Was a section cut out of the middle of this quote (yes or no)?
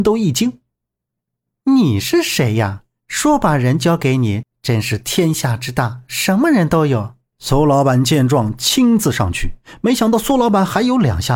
yes